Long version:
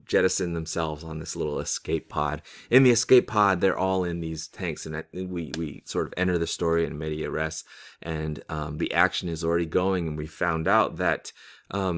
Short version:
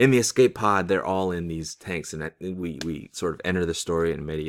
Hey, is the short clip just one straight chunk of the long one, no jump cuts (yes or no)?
yes